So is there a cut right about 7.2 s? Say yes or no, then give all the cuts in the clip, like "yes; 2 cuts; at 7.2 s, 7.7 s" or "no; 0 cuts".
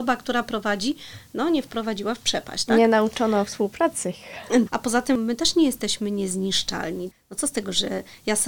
no; 1 cut; at 4.7 s